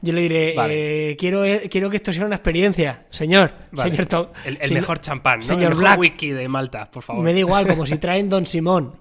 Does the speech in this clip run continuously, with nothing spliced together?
yes; 0 cuts

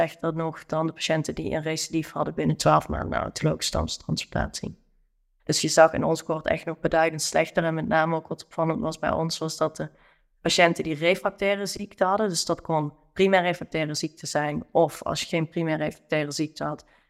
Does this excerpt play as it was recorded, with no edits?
no; 1 cut; at 5.4 s

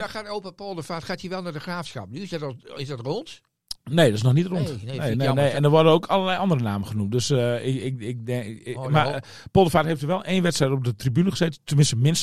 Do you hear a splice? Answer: no; 0 cuts

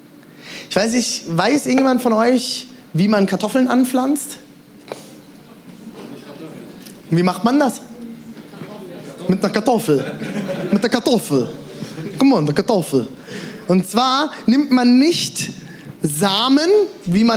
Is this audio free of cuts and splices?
yes; 0 cuts

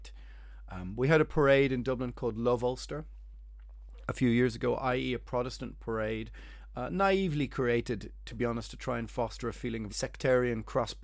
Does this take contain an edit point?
yes; 1 cut; at 9.9 s

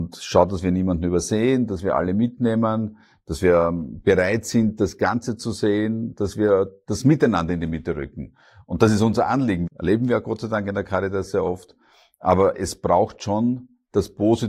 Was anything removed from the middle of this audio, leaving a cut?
yes; 1 cut; at 9.7 s

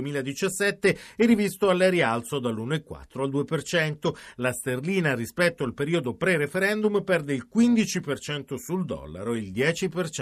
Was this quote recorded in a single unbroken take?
yes; 0 cuts

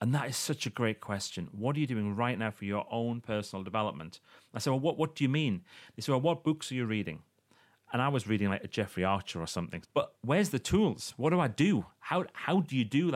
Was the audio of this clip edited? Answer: yes; 2 cuts; at 7.9 s, 9.8 s

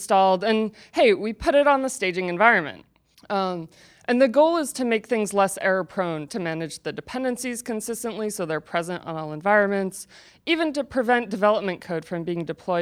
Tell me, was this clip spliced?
yes; 2 cuts; at 3.1 s, 6.3 s

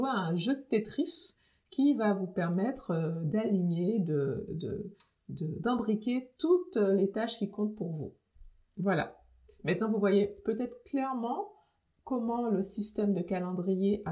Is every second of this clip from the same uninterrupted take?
yes; 0 cuts

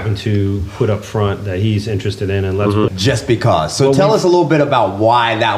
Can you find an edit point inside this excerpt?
yes; 1 cut; at 2.9 s

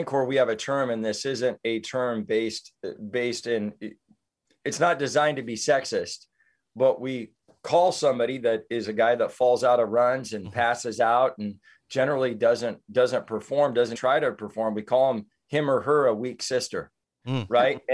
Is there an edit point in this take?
yes; 1 cut; at 14.0 s

